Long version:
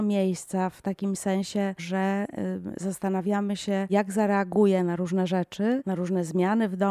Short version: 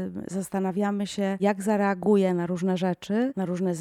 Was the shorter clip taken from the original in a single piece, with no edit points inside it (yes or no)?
yes